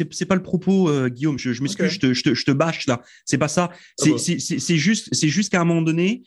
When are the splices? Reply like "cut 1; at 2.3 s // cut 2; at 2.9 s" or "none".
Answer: none